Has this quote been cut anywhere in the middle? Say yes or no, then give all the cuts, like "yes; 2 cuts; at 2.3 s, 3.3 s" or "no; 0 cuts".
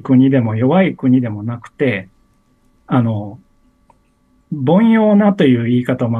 no; 0 cuts